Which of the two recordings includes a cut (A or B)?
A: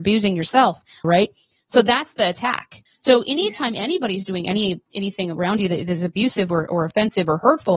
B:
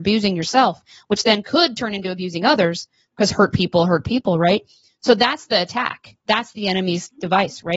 A